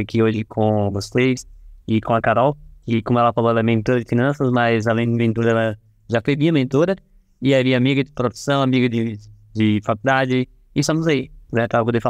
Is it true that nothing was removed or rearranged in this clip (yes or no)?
yes